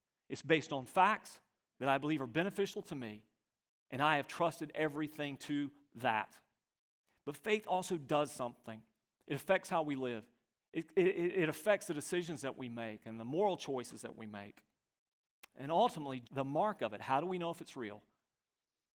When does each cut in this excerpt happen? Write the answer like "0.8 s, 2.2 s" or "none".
1.7 s, 10.6 s, 16.2 s